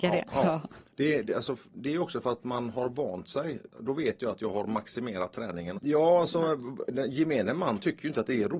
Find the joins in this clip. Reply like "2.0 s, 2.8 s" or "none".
1.7 s, 5.8 s